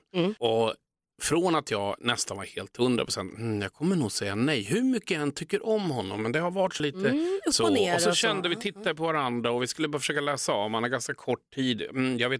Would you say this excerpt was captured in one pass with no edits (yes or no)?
no